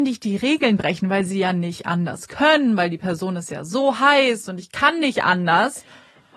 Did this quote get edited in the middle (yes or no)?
no